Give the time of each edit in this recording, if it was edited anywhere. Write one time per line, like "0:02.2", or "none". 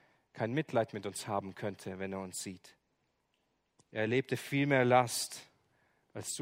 0:03.8